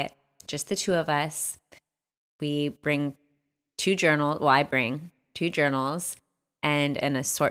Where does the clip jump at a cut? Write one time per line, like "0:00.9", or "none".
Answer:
none